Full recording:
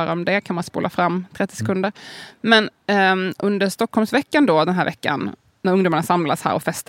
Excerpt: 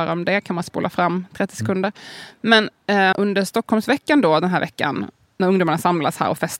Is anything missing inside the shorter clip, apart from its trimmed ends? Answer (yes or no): yes